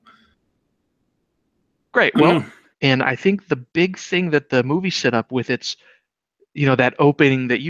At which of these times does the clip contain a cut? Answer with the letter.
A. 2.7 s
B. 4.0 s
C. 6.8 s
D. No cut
A